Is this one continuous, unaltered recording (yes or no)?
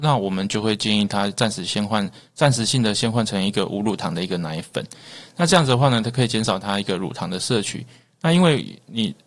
yes